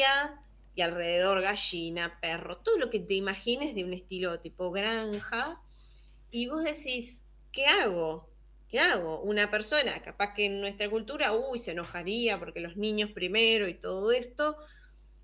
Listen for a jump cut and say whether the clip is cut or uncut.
uncut